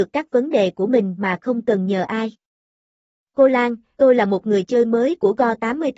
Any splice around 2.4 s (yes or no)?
no